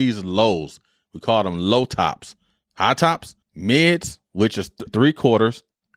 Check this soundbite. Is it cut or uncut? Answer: cut